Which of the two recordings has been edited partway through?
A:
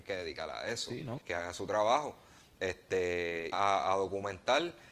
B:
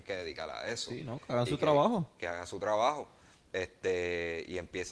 A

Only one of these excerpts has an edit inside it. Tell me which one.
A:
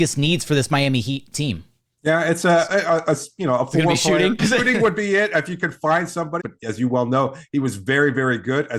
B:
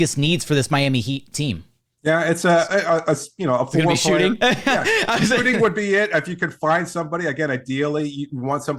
A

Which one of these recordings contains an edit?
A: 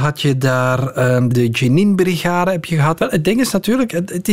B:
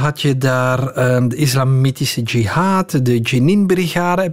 A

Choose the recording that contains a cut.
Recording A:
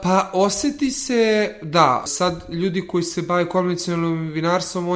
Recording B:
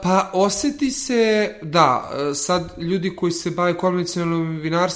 A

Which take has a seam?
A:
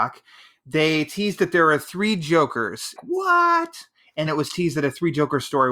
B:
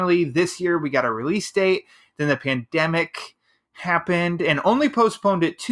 A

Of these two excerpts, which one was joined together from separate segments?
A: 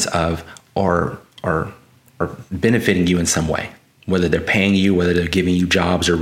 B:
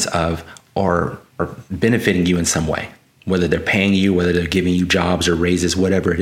B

